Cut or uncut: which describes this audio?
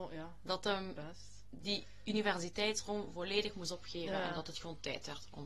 uncut